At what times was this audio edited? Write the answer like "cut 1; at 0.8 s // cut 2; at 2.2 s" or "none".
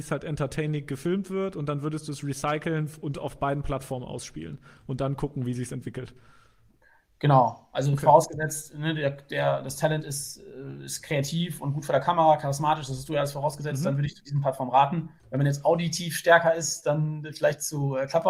none